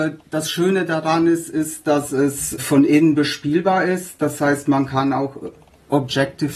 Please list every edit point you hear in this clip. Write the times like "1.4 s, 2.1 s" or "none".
2.6 s